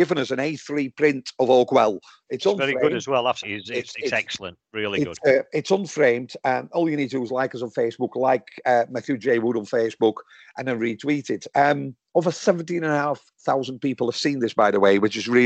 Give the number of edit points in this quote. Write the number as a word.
one